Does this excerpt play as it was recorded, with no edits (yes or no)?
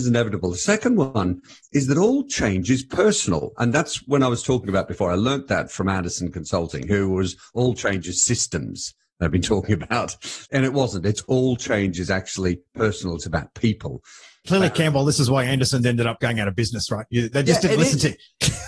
yes